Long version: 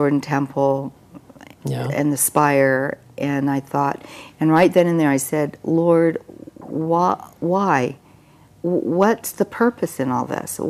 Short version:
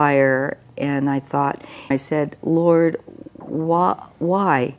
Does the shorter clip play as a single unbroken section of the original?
no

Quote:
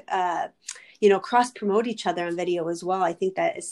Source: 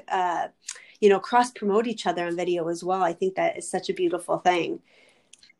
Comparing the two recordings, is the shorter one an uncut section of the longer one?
yes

